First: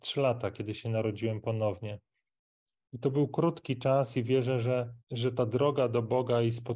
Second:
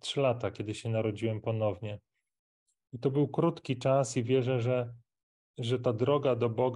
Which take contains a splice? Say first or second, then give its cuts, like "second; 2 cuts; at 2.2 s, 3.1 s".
first; 1 cut; at 5.0 s